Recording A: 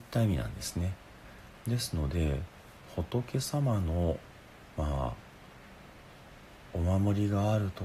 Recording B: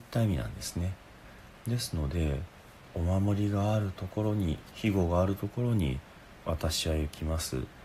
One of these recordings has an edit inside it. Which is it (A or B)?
B